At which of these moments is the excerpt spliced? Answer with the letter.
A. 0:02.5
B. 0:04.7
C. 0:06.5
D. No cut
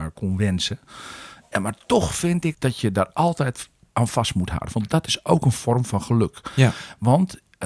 A